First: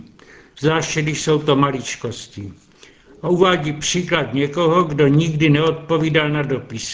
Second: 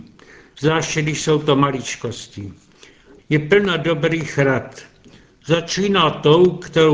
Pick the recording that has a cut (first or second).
second